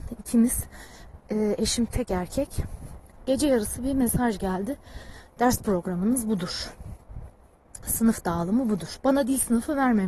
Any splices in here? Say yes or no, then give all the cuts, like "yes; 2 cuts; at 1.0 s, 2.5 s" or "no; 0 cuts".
no; 0 cuts